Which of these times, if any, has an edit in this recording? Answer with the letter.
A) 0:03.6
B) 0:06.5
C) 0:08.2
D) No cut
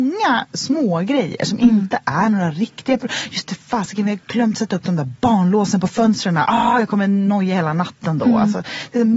D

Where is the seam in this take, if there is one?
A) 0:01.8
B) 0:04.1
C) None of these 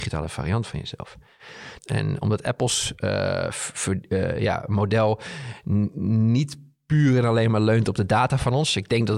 A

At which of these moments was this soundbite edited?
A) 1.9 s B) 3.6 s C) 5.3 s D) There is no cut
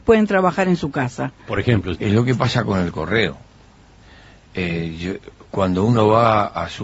A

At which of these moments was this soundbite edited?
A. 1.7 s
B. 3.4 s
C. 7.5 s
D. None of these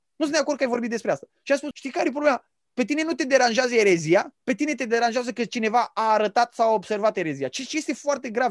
A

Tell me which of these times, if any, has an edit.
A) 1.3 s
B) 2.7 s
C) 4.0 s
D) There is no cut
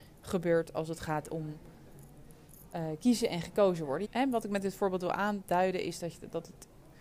C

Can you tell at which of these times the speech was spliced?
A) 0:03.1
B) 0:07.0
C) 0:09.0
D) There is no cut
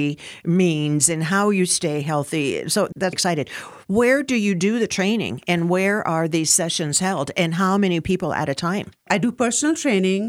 A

